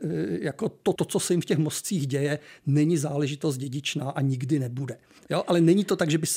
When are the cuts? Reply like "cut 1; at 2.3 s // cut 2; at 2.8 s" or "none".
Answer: cut 1; at 0.9 s // cut 2; at 5.2 s